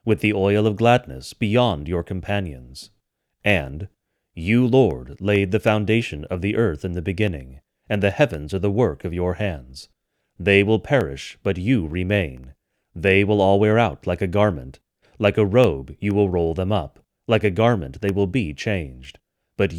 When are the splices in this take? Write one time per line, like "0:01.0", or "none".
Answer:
none